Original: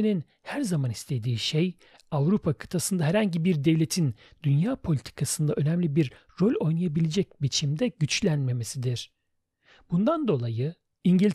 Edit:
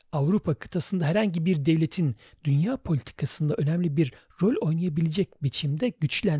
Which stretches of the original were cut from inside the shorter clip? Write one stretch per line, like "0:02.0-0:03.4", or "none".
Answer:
none